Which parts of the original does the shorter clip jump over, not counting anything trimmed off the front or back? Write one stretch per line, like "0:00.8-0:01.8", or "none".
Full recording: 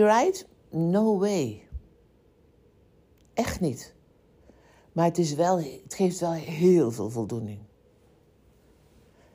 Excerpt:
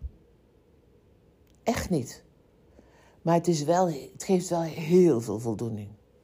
none